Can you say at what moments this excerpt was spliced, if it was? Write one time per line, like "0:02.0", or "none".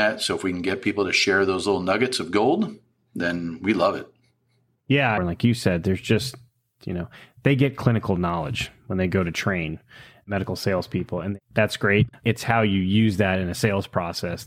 0:05.2
0:12.1